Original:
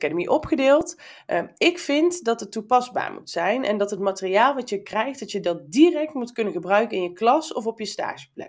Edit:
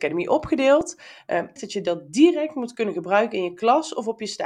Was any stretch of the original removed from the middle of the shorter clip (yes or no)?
yes